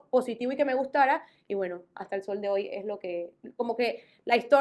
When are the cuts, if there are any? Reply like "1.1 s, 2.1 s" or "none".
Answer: none